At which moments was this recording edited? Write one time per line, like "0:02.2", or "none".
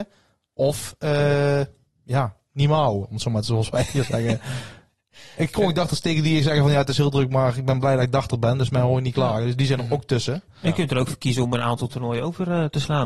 none